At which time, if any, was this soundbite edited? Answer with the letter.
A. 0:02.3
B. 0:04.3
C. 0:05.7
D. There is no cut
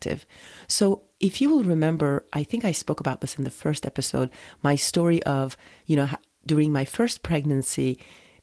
D